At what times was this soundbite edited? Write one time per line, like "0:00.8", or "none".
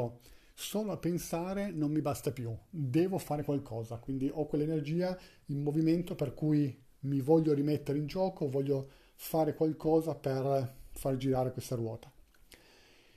none

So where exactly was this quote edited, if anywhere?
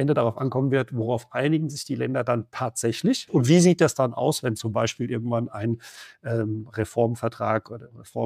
0:03.3

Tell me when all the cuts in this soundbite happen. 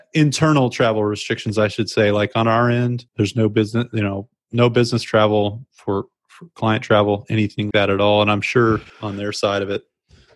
0:03.1
0:07.7
0:08.9

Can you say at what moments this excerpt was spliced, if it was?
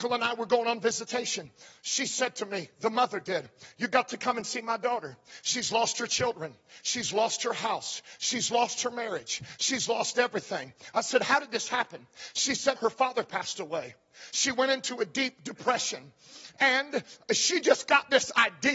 0:12.8
0:14.3

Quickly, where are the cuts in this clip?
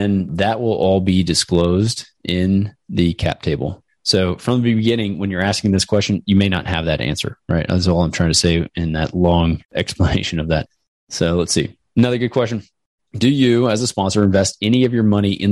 0:03.9
0:09.6

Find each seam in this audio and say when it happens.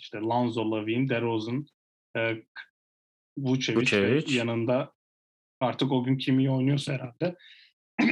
none

